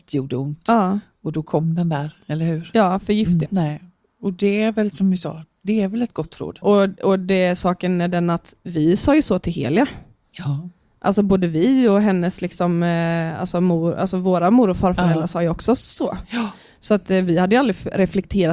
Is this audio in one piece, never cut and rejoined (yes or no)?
no